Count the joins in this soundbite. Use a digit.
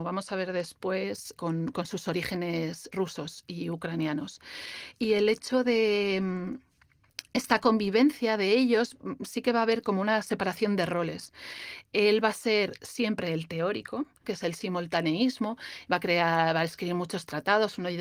3